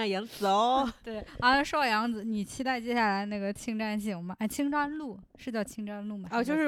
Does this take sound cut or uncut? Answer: uncut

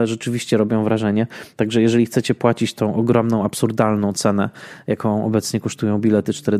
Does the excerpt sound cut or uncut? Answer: uncut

